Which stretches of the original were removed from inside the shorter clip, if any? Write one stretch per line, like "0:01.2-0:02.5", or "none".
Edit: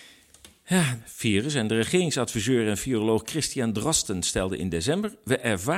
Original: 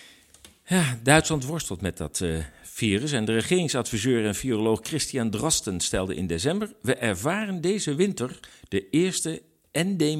0:01.0-0:02.6

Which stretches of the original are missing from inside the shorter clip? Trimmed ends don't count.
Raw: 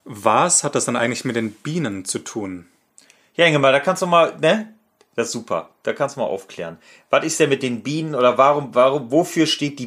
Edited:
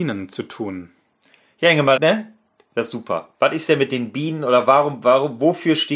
0:03.7-0:04.4
0:05.8-0:07.1

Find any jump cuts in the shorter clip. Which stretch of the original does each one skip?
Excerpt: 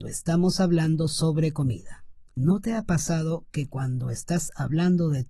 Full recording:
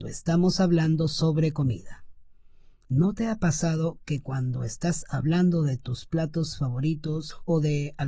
0:02.3-0:02.8

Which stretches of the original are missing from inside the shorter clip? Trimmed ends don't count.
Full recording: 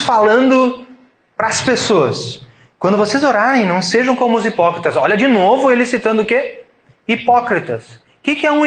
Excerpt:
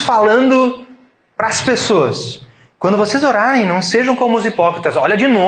none

